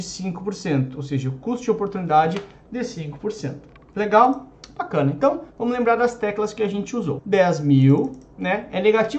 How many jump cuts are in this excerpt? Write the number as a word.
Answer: one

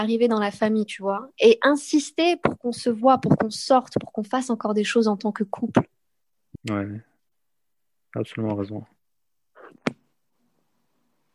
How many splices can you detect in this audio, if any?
one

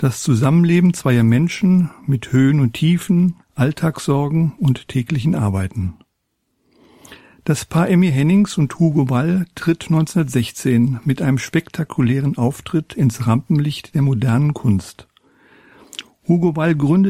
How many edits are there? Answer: one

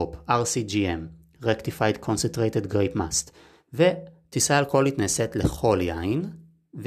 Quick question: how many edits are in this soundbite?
one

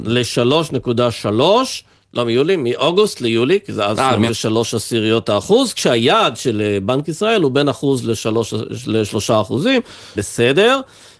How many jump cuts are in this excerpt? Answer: two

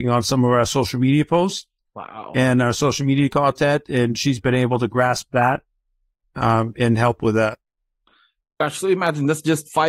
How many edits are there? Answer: zero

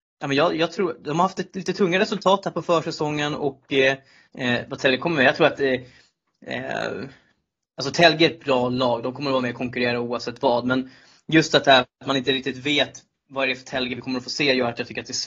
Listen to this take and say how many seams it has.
one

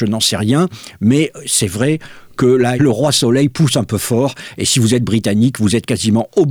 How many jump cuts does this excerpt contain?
one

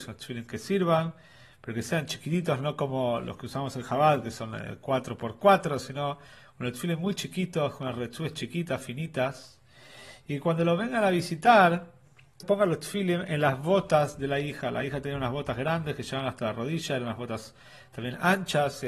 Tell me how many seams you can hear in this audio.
one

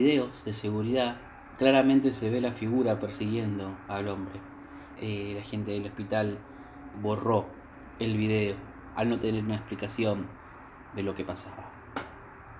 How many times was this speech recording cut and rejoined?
two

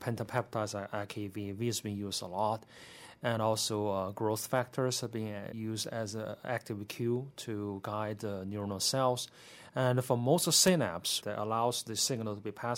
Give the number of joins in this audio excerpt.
two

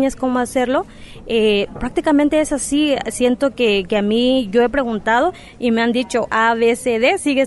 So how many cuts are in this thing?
one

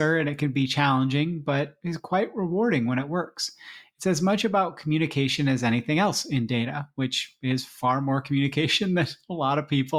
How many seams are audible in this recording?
zero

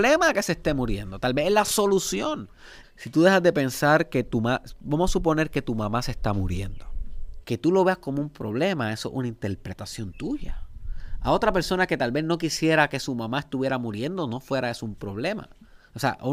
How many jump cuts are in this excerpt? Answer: two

